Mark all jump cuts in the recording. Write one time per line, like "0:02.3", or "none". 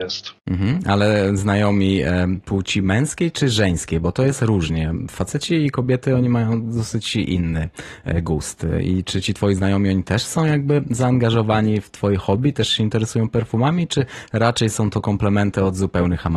none